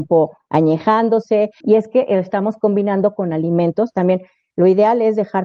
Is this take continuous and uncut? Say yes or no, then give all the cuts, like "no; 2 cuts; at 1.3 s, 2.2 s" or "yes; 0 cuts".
no; 1 cut; at 1.6 s